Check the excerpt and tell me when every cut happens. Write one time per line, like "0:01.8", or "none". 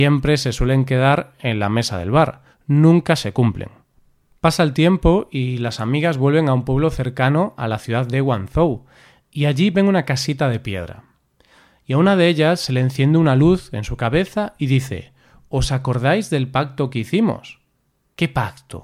none